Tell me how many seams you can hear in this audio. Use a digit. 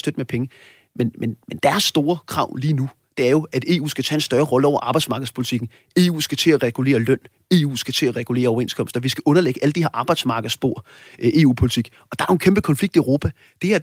0